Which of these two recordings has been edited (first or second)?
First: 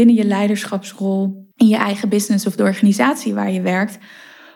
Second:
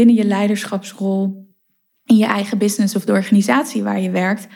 first